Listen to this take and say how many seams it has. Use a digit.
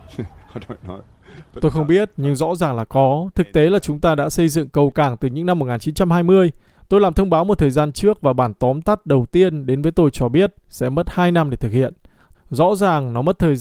2